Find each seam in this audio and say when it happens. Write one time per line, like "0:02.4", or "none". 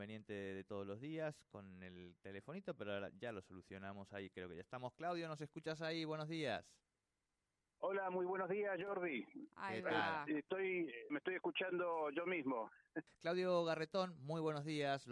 0:09.5
0:11.1
0:13.1